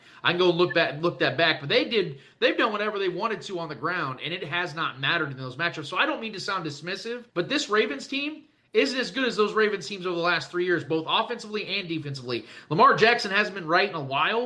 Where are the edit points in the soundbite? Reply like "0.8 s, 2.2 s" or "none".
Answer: 7.3 s